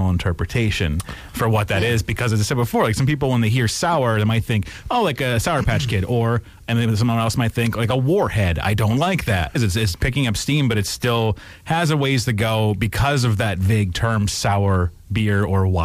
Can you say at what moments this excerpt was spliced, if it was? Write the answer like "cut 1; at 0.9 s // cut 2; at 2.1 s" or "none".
cut 1; at 9.6 s